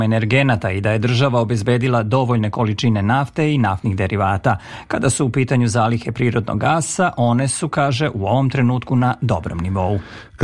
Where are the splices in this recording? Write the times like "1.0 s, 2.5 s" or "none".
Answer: none